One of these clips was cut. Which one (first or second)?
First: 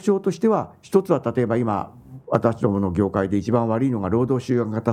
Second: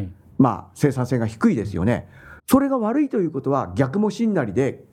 second